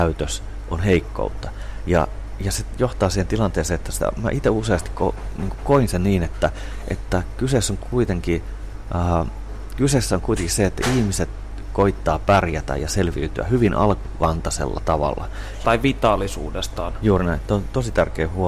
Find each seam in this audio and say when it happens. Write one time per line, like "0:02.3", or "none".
0:15.6